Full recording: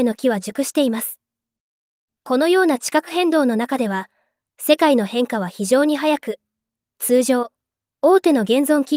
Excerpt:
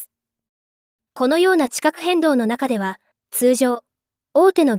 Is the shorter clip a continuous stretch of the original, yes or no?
no